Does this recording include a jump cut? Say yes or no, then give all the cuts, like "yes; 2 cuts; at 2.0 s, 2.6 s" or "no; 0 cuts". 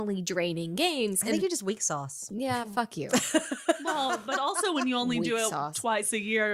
no; 0 cuts